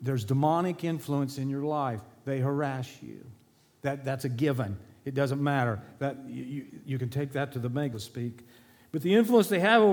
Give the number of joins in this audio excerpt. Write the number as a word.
one